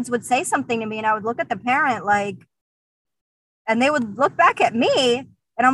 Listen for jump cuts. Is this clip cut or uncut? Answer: uncut